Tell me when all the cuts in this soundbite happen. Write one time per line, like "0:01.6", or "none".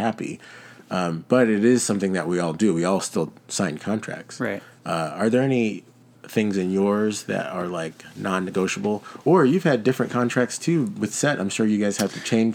none